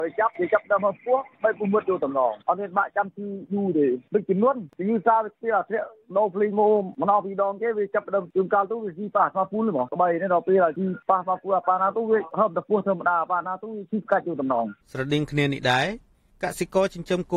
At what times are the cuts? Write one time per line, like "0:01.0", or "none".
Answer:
0:14.8